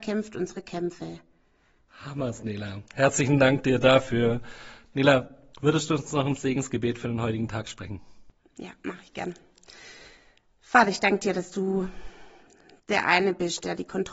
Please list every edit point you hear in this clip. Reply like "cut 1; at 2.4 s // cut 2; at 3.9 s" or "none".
cut 1; at 1.9 s